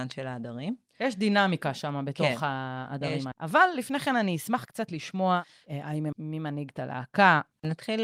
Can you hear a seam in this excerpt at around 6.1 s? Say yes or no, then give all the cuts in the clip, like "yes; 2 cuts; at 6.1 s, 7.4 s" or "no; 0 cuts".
yes; 2 cuts; at 3.3 s, 6.1 s